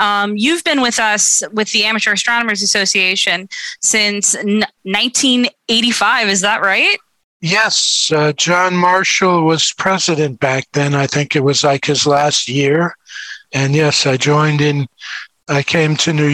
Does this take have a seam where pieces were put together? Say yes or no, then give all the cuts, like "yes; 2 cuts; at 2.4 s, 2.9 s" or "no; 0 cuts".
no; 0 cuts